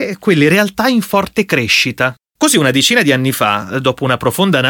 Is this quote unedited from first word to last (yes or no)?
no